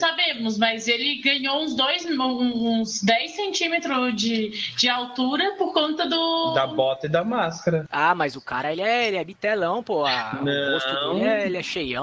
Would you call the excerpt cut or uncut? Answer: uncut